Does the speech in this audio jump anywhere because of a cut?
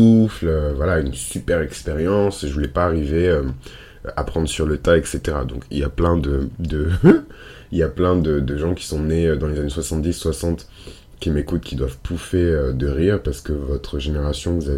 no; 0 cuts

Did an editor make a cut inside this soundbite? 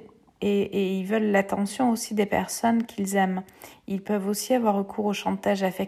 yes; 1 cut; at 3.7 s

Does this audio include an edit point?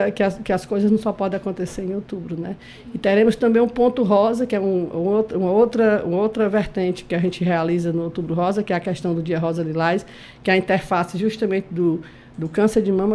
no; 0 cuts

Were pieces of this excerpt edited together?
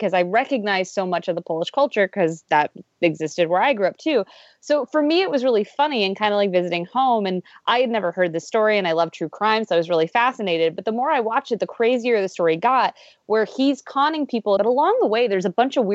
yes; 1 cut; at 14.6 s

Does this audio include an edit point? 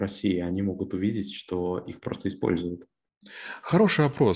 no; 0 cuts

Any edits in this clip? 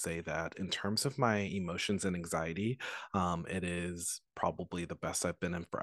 no; 0 cuts

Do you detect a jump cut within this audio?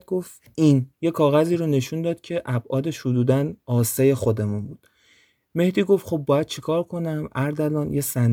yes; 1 cut; at 0.9 s

